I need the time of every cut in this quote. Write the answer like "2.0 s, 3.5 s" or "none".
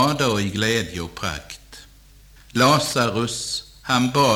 2.4 s